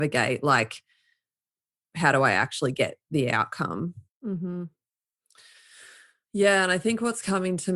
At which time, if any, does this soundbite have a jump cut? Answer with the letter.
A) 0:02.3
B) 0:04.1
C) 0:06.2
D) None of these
B